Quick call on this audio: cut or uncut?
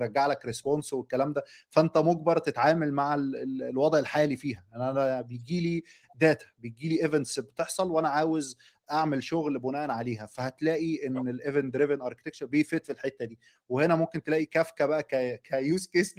uncut